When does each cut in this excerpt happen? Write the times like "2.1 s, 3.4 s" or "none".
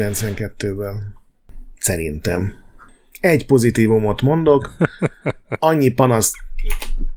none